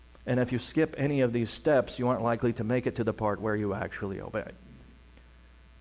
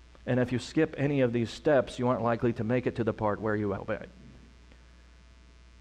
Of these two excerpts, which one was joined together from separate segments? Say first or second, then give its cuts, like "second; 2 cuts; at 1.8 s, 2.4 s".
second; 1 cut; at 3.8 s